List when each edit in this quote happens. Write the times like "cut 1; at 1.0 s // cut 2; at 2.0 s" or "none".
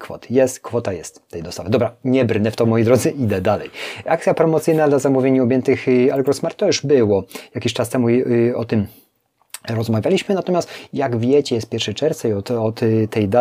none